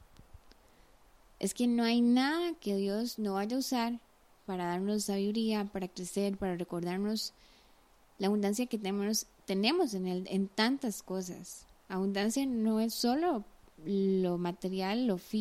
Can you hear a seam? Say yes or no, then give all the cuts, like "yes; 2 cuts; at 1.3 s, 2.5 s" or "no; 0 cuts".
no; 0 cuts